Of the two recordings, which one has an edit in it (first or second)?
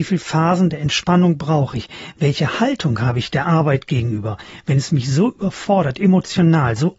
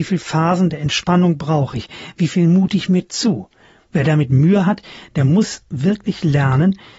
second